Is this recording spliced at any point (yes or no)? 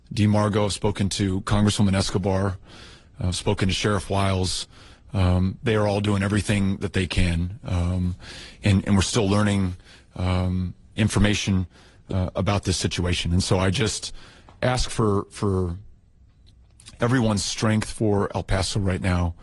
no